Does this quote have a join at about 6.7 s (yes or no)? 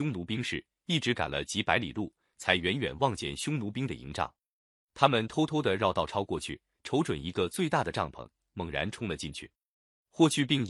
no